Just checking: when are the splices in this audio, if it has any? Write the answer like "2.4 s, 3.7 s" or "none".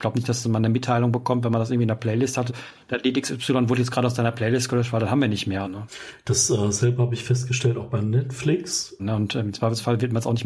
2.5 s, 5.6 s, 9.0 s